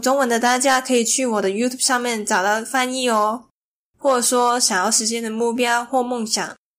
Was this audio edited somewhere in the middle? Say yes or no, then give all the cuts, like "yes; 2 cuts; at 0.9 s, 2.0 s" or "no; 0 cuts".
yes; 1 cut; at 3.9 s